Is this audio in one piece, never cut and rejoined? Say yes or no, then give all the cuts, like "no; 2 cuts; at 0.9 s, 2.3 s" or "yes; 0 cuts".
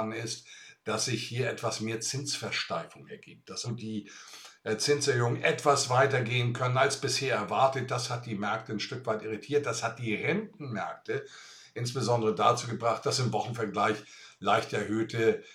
no; 1 cut; at 3.6 s